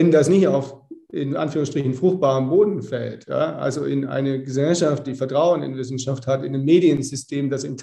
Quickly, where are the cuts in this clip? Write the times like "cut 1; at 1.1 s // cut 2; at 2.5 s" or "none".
cut 1; at 5.0 s